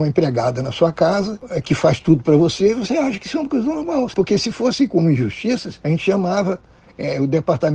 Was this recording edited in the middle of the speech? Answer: yes; 2 cuts; at 4.1 s, 5.8 s

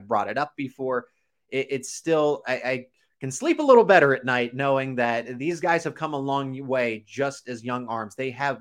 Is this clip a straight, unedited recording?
yes; 0 cuts

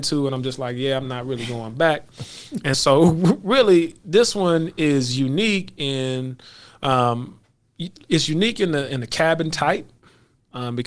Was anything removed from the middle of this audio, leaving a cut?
no; 0 cuts

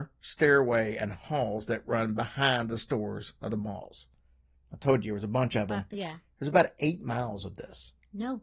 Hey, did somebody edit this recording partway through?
no; 0 cuts

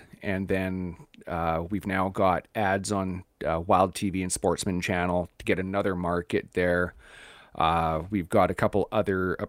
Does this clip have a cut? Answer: no; 0 cuts

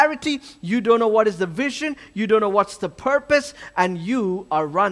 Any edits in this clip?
no; 0 cuts

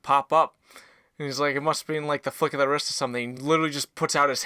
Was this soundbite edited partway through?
no; 0 cuts

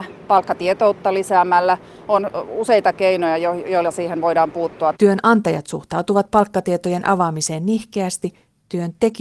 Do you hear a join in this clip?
yes; 1 cut; at 4.9 s

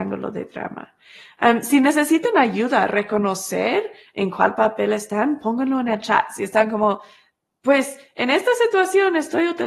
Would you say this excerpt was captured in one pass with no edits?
yes; 0 cuts

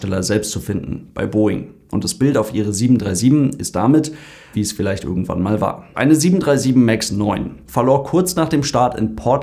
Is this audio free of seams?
no; 3 cuts; at 4.5 s, 5.9 s, 7.7 s

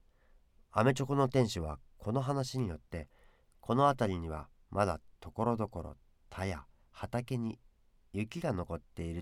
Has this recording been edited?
no; 0 cuts

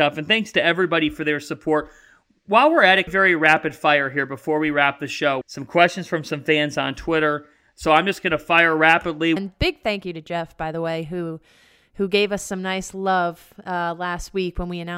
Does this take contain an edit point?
yes; 3 cuts; at 3.1 s, 5.4 s, 9.4 s

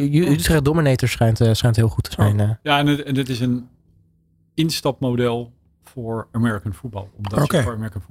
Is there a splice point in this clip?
no; 0 cuts

